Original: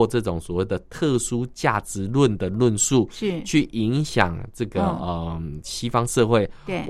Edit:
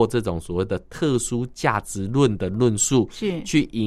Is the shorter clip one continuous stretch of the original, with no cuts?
yes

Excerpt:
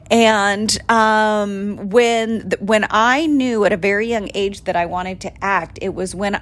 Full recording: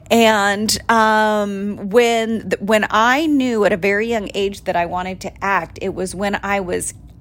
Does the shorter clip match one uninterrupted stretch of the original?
yes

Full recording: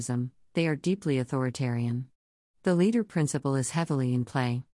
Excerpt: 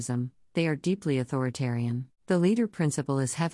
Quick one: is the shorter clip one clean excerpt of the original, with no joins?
no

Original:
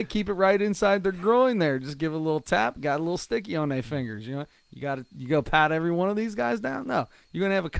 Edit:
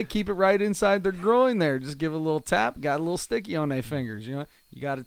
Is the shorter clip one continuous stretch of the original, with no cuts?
yes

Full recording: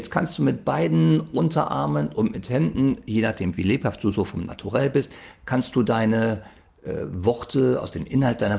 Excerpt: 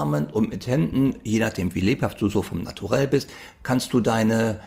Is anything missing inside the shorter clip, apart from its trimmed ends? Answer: no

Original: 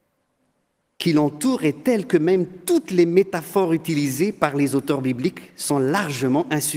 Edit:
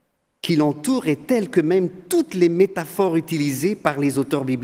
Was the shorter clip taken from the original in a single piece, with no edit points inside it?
yes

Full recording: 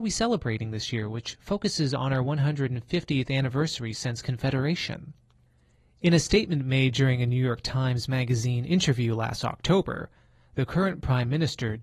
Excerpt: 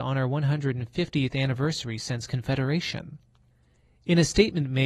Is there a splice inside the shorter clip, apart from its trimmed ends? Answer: no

